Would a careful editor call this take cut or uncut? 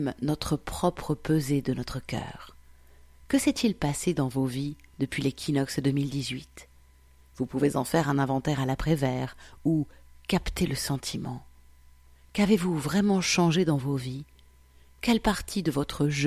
uncut